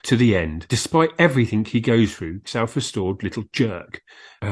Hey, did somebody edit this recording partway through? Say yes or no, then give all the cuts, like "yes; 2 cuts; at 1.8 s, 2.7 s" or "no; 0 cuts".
yes; 1 cut; at 2.5 s